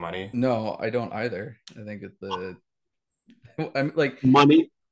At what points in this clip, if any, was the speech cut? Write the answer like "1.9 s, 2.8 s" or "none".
none